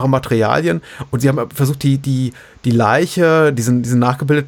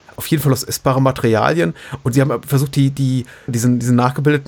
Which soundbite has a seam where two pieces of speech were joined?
second; 1 cut; at 3.5 s

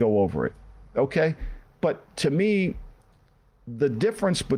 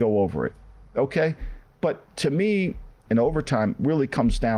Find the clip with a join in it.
second; 1 cut; at 3.1 s

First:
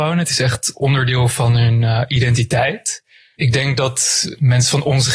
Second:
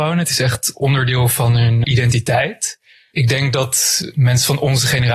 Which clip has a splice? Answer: second; 1 cut; at 1.8 s

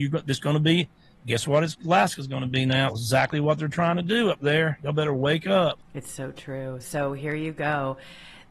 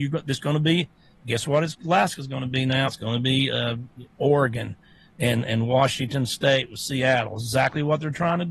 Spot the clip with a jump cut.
first; 1 cut; at 2.9 s

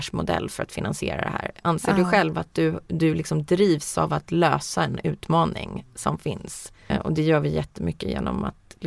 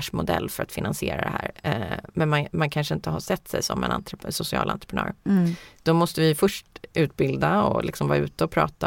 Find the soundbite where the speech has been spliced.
first; 2 cuts; at 1.6 s, 6.9 s

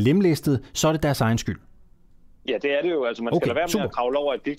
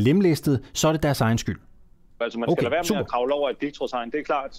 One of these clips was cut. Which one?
second; 1 cut; at 2.2 s

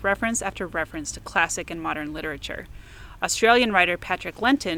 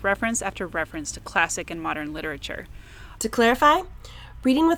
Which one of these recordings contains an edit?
second; 1 cut; at 3.2 s

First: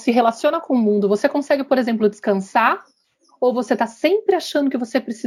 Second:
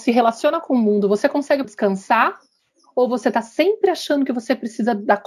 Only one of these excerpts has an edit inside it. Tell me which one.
second; 1 cut; at 1.6 s

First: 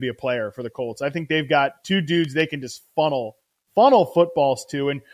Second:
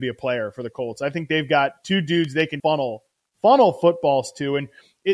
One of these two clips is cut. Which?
second; 1 cut; at 2.6 s

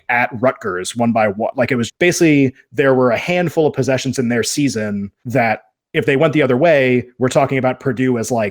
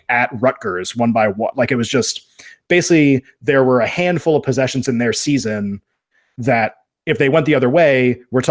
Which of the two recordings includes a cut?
first; 2 cuts; at 1.9 s, 5.2 s

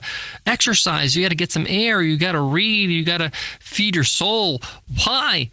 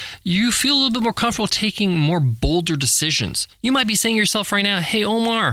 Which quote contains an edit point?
second; 1 cut; at 3.5 s

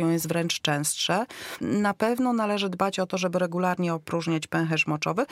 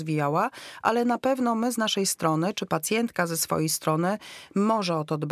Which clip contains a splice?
first; 1 cut; at 1.6 s

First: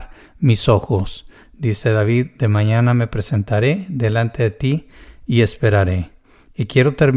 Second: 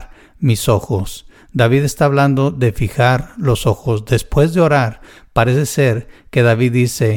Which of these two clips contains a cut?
first; 1 cut; at 1.4 s

